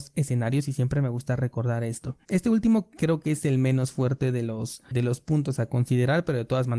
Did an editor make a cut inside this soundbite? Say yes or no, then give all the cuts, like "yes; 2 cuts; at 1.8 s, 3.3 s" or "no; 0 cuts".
yes; 2 cuts; at 2.2 s, 4.9 s